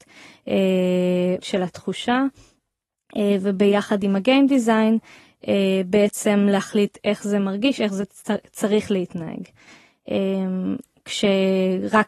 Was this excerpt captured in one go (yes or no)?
no